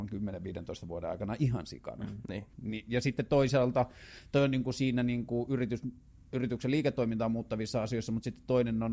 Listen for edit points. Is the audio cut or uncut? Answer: cut